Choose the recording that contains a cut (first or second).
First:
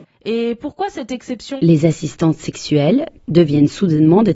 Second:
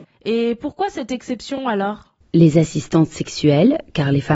first